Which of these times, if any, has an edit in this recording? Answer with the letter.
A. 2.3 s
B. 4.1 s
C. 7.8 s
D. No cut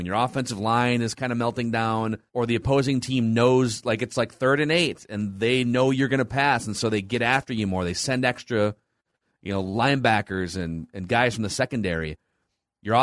A